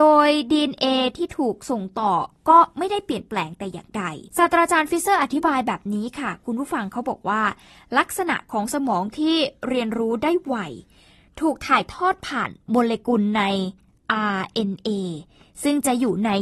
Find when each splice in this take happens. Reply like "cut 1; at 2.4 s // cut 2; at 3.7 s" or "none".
cut 1; at 4.3 s